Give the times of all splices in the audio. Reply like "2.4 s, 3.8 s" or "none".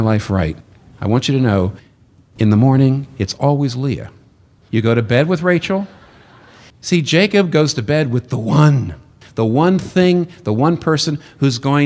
6.7 s, 9.2 s